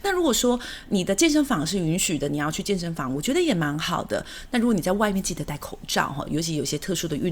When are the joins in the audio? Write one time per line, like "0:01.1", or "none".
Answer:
none